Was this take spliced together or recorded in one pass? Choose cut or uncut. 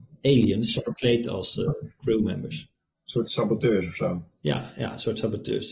uncut